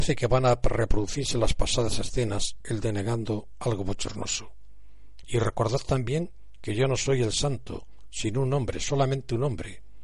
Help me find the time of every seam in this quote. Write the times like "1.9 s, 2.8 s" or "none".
2.6 s, 5.2 s